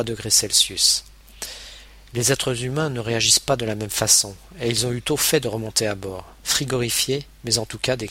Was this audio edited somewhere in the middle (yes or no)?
no